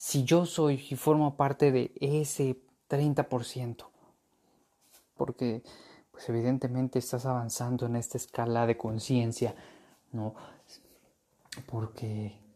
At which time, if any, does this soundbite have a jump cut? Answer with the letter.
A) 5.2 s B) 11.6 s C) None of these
A